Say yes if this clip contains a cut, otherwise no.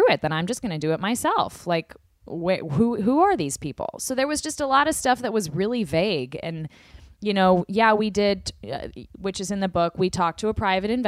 no